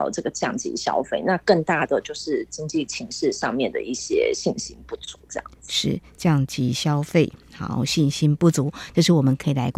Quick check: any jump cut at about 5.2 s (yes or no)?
no